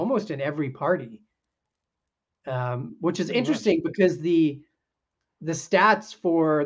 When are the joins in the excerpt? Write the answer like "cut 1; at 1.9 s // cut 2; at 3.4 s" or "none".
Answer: none